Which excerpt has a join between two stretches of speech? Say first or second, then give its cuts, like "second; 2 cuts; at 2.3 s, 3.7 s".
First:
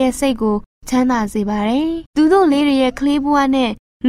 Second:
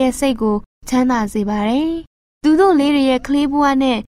first; 1 cut; at 2.1 s